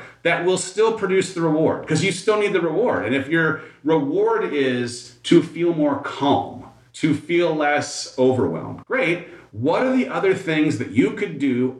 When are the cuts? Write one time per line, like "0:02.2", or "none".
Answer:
0:08.8